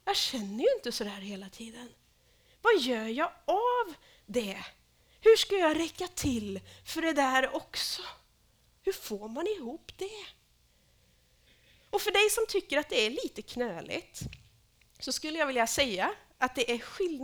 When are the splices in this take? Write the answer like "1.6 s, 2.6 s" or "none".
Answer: 8.8 s